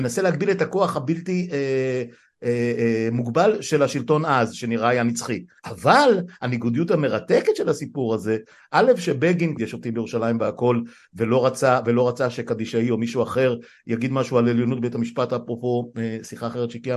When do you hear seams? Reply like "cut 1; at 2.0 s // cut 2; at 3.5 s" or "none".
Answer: cut 1; at 5.6 s // cut 2; at 9.6 s

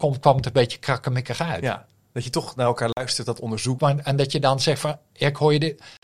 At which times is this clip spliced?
cut 1; at 3.8 s

